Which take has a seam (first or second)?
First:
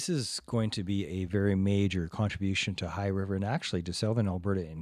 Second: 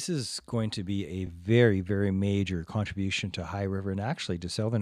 first